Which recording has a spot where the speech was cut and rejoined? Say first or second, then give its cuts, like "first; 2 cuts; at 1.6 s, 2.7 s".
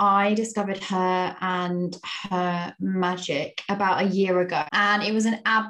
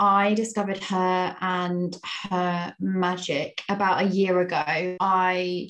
first; 1 cut; at 4.7 s